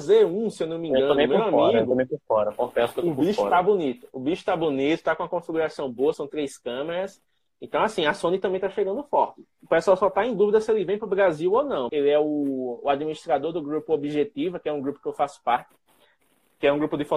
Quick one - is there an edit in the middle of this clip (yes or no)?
yes